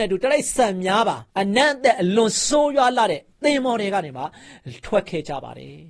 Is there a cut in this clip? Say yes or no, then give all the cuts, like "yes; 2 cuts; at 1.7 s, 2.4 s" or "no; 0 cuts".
yes; 1 cut; at 1.3 s